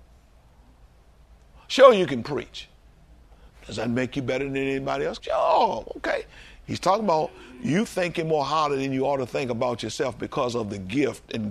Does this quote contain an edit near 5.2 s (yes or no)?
yes